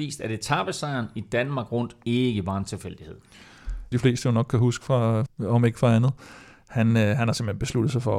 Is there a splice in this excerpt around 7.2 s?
no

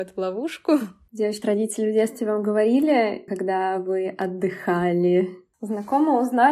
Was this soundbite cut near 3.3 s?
yes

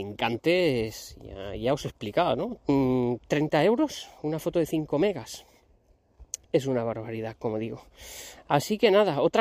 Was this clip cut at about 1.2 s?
no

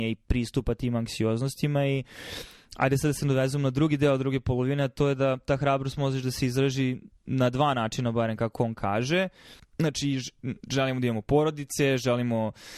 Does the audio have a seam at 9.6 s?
yes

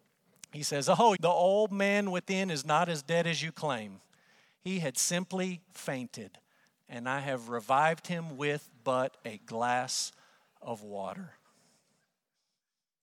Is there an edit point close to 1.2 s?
yes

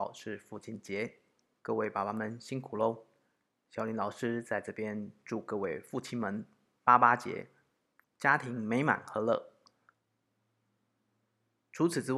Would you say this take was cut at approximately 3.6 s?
no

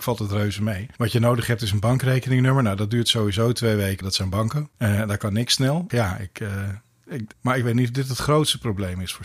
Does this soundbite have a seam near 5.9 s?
yes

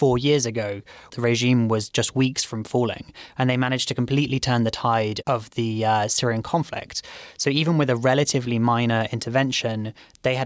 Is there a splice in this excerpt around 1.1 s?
yes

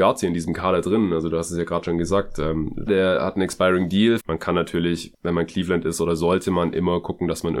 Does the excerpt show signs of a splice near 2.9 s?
yes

